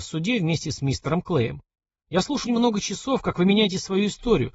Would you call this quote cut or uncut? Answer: cut